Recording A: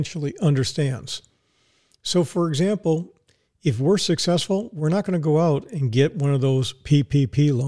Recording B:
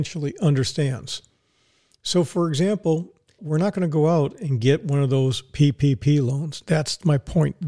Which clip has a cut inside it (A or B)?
B